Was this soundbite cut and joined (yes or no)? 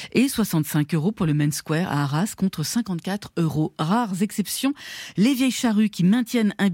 no